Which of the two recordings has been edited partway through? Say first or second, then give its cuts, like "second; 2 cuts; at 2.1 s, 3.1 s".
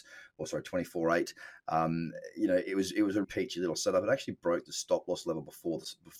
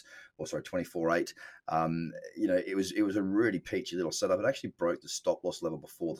first; 1 cut; at 3.2 s